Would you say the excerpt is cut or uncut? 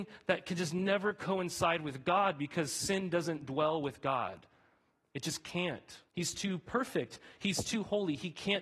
cut